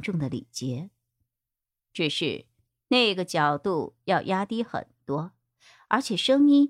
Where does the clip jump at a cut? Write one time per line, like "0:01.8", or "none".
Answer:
none

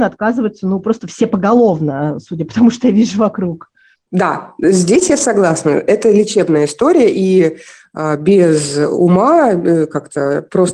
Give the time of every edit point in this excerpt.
none

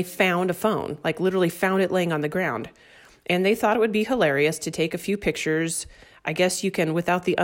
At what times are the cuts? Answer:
none

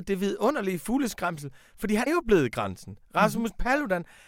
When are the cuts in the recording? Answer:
0:02.1

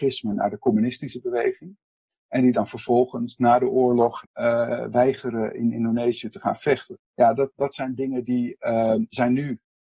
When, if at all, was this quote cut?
0:04.2
0:07.0

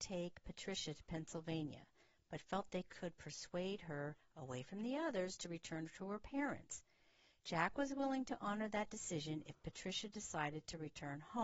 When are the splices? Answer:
none

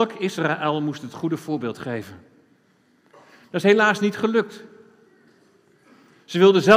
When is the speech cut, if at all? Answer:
none

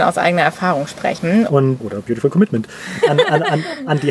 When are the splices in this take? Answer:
0:01.5
0:03.0

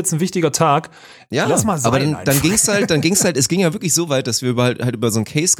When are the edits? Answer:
0:01.3

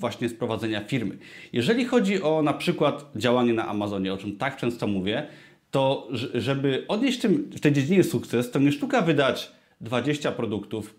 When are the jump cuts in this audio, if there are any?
none

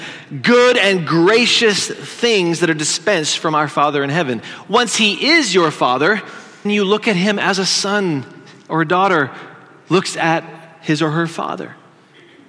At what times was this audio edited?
0:06.6

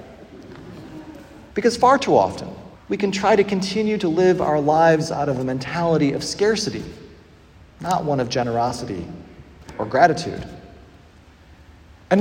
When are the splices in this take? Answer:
0:01.5
0:02.7

